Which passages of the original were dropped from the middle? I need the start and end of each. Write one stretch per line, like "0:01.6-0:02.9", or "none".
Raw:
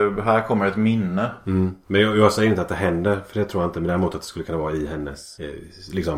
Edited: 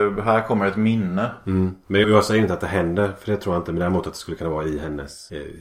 0:02.0-0:02.1